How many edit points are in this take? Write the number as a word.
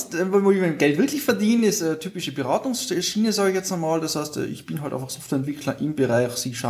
zero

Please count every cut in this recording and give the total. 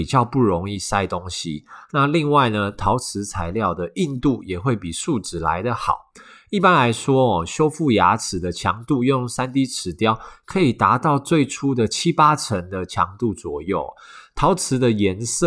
zero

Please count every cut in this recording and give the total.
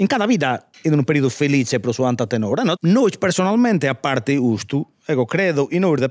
one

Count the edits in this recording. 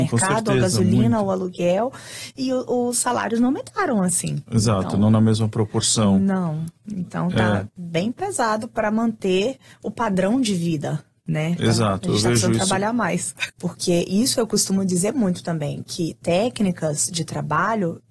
one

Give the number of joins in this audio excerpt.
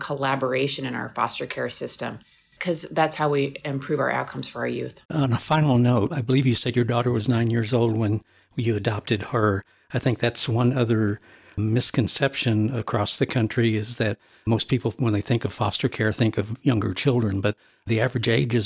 one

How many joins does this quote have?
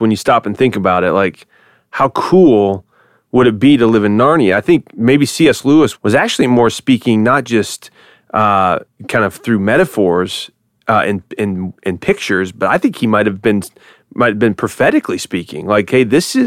one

